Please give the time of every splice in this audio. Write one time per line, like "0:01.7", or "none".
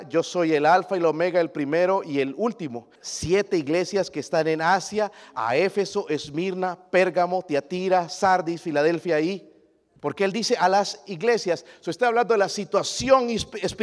0:03.0
0:10.0